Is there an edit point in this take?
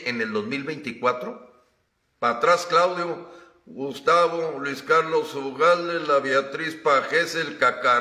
no; 0 cuts

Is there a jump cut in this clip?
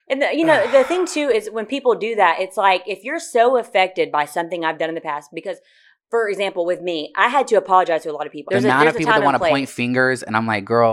yes; 1 cut; at 8.5 s

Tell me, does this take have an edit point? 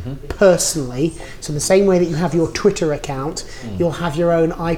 no; 0 cuts

